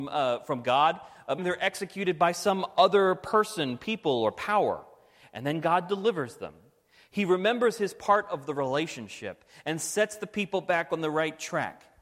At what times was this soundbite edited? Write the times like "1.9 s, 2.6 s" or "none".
1.4 s